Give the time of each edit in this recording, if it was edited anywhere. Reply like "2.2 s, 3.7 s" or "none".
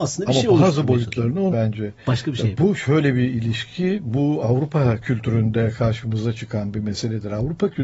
1.5 s